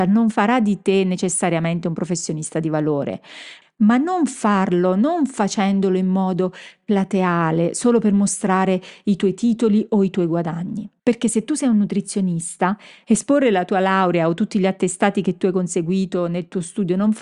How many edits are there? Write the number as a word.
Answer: two